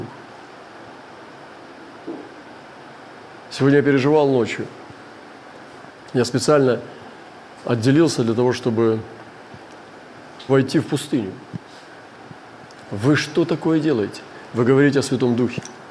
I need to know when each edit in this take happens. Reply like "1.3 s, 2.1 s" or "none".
10.5 s, 12.8 s